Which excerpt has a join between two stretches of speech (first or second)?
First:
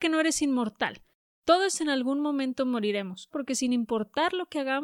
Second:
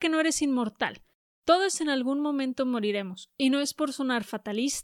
first